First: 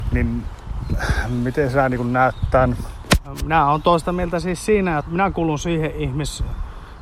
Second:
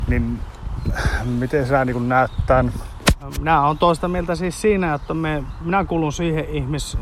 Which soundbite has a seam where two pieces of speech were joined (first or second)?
first